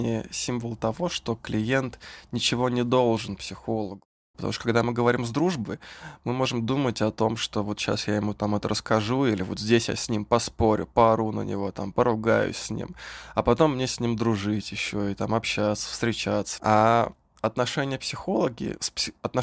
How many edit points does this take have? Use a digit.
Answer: 2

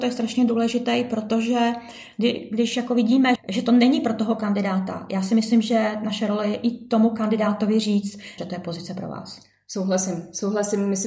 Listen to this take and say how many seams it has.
2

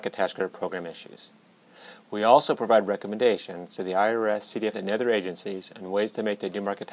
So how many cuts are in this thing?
1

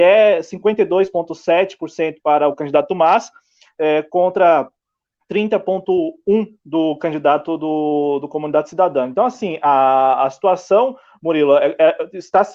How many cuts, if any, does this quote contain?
0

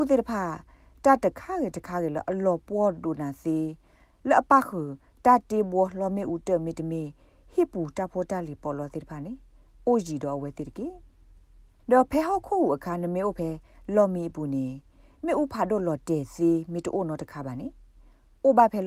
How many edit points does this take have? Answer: 0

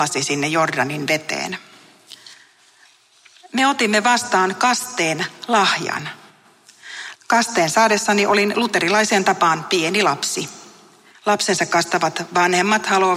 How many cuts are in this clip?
2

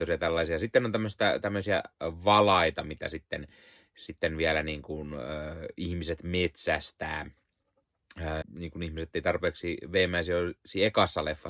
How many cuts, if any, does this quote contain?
1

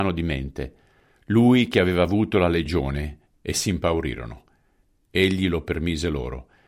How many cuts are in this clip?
1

